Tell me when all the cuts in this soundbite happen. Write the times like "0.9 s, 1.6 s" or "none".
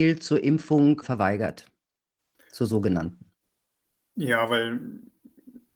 1.0 s